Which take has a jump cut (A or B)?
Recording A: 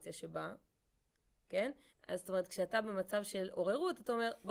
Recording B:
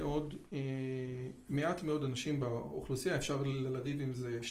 A